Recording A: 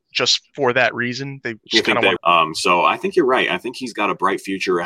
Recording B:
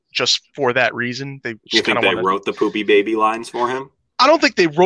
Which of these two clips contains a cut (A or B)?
A